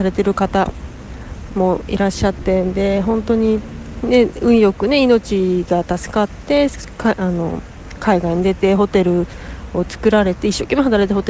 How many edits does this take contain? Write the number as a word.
one